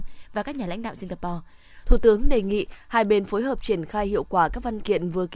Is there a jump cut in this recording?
yes; 1 cut; at 1.8 s

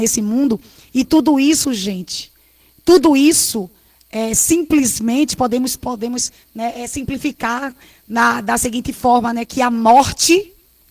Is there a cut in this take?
no; 0 cuts

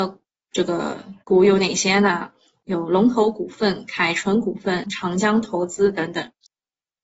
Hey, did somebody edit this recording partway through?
yes; 2 cuts; at 1.2 s, 4.8 s

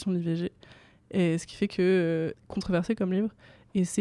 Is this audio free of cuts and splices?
no; 1 cut; at 2.3 s

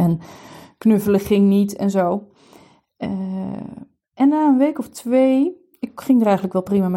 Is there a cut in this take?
no; 0 cuts

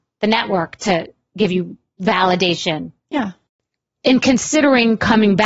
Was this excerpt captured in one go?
no; 1 cut; at 3.0 s

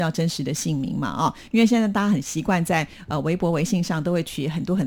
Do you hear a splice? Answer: no; 0 cuts

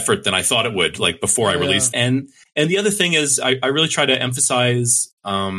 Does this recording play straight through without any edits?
no; 1 cut; at 1.9 s

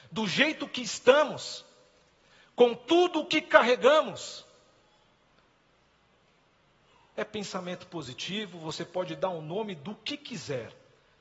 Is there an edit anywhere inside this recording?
no; 0 cuts

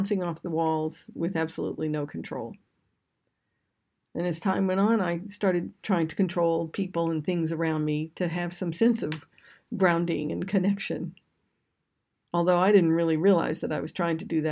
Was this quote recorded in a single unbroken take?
yes; 0 cuts

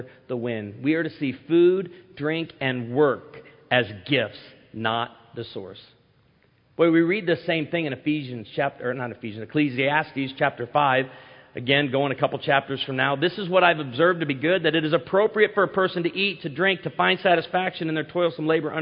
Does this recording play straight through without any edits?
yes; 0 cuts

